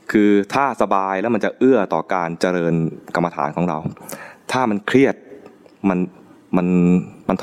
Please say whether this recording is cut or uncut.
uncut